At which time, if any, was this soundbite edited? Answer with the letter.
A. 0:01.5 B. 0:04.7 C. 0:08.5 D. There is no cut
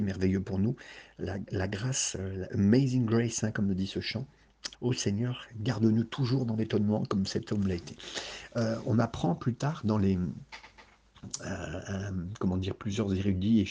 B